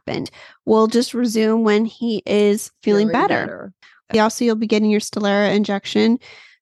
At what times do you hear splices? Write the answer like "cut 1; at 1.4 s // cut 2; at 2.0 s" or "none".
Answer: cut 1; at 4.1 s